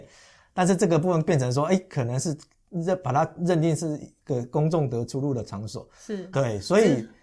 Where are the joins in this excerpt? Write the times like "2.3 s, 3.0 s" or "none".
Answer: 6.3 s